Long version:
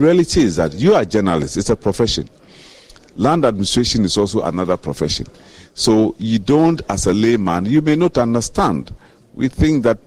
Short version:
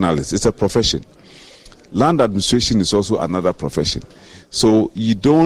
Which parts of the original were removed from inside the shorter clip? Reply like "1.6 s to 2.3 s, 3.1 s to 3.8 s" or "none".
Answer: none